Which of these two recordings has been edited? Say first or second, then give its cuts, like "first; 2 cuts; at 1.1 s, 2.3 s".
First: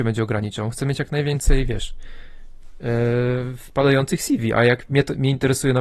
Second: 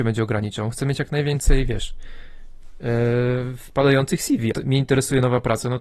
second; 1 cut; at 4.5 s